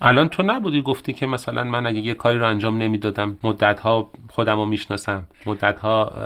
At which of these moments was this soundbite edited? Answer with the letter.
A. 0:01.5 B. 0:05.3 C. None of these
B